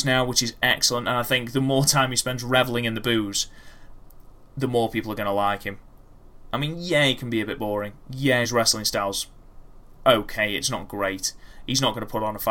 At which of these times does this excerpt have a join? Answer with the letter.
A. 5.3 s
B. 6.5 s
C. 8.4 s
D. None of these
D